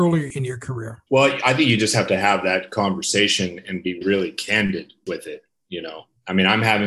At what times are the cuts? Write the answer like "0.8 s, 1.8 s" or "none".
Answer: 1.1 s, 4.0 s

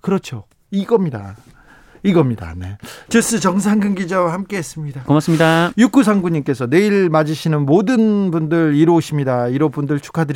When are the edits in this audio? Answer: 3.1 s, 5.1 s

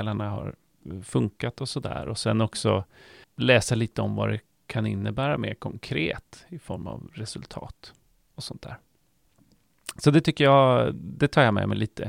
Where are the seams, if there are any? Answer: 3.2 s

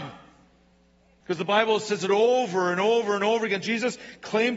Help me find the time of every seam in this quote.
1.2 s

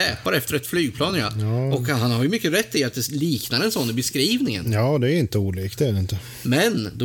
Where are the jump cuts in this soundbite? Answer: none

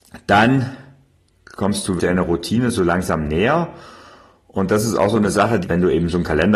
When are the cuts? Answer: 2.0 s, 5.6 s

